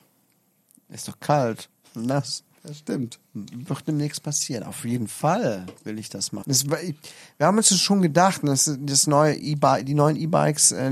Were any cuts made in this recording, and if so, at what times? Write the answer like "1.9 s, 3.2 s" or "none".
3.3 s, 6.4 s